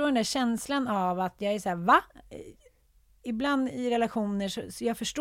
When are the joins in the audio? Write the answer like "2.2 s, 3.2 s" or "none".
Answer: none